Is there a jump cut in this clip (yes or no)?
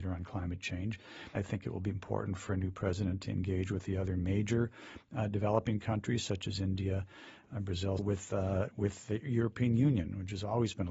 yes